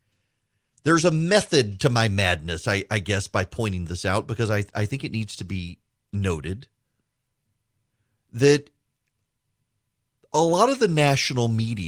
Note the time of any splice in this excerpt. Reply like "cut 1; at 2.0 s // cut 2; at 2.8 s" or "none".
none